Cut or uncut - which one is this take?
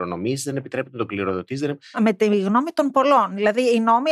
cut